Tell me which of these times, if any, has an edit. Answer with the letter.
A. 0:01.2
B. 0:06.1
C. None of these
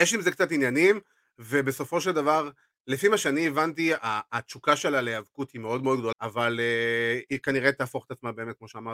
B